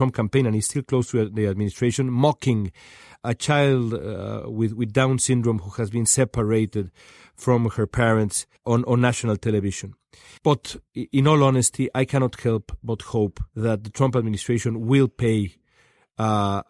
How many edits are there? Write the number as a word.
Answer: three